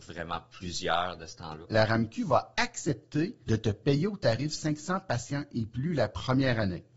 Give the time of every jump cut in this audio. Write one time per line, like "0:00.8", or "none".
0:01.6